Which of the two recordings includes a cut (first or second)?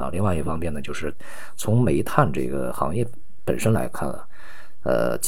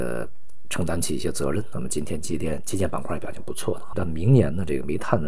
second